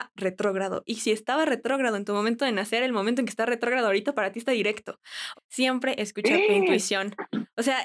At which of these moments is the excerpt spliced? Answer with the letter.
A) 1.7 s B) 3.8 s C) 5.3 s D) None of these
C